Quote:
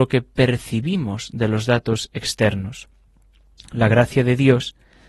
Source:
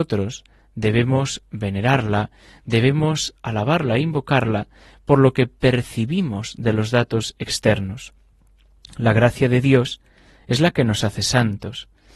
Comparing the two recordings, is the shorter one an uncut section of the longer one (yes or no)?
yes